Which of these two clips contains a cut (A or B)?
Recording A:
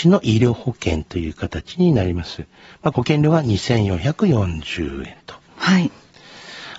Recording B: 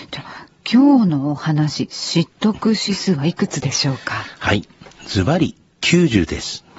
A